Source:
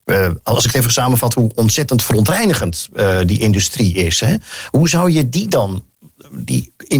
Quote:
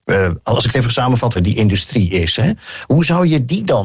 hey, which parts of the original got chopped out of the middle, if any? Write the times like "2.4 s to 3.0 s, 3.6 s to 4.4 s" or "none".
1.3 s to 3.2 s